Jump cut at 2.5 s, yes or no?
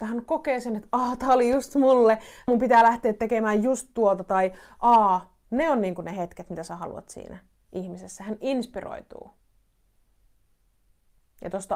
yes